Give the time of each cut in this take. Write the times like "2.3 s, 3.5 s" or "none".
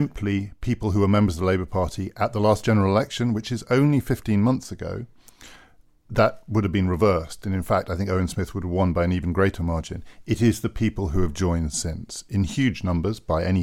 none